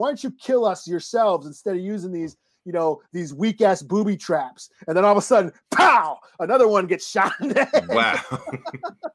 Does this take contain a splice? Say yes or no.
no